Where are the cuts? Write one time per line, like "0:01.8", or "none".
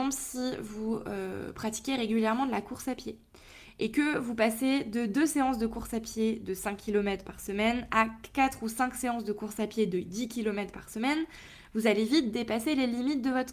none